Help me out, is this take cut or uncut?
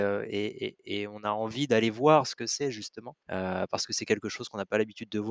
uncut